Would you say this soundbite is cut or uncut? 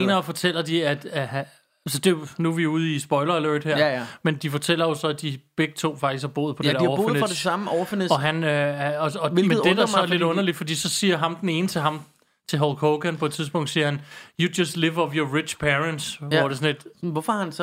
uncut